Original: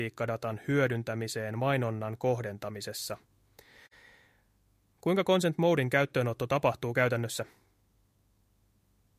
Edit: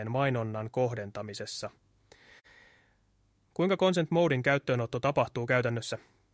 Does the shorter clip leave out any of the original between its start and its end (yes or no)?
no